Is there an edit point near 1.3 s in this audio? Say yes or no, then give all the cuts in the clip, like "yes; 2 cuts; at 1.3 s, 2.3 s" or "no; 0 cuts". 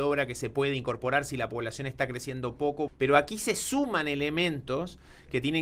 no; 1 cut; at 2.9 s